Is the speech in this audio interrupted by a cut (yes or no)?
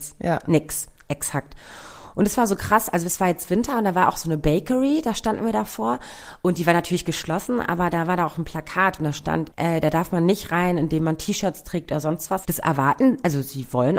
yes